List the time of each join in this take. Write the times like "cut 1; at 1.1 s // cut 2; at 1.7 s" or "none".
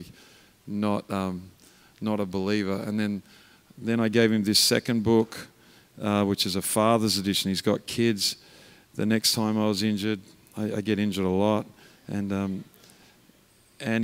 none